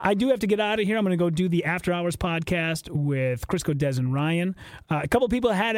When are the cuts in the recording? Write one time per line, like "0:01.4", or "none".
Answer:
none